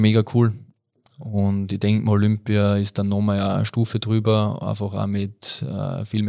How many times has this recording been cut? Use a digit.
0